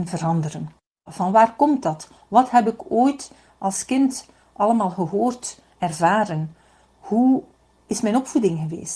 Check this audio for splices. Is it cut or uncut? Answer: cut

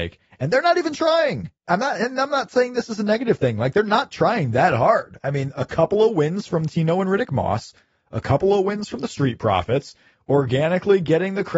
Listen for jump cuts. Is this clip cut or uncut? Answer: cut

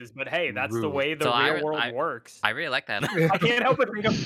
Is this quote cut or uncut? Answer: cut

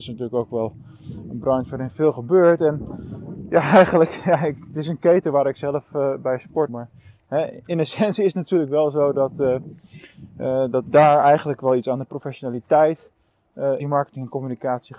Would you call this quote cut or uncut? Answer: cut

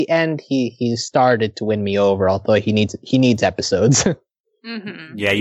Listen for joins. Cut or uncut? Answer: uncut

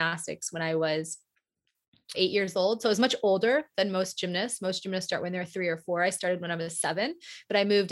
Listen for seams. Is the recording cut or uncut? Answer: cut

